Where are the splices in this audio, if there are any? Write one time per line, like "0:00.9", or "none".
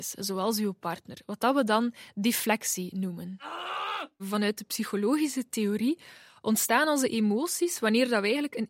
0:04.2

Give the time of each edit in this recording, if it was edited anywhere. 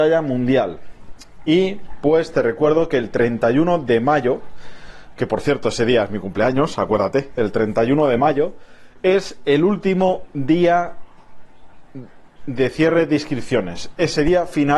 none

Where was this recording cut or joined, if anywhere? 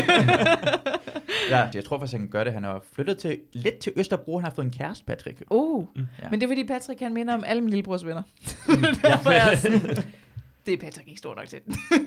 0:01.7

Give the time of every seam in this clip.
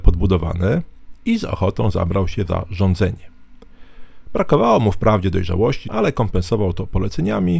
0:05.8

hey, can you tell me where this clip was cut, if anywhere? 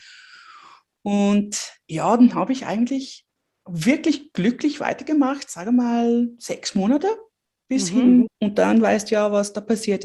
0:08.3

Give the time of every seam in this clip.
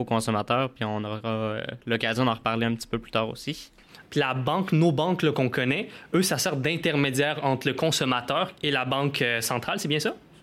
0:04.0
0:08.5

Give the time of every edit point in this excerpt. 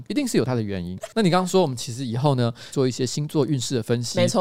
0:01.0
0:02.7

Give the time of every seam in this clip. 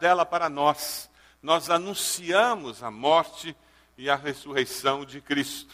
none

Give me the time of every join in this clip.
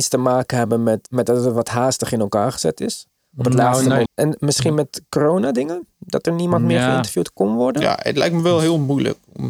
0:01.1
0:04.0

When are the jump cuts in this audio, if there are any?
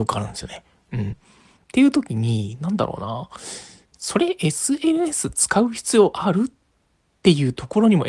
none

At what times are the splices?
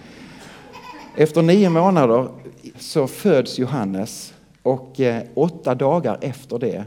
0:02.7

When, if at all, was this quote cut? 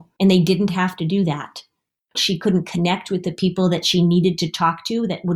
0:02.1

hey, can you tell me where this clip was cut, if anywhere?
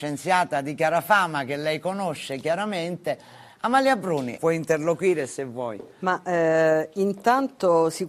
0:04.4

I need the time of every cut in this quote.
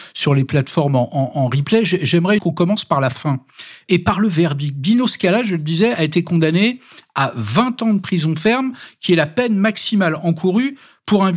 0:02.4

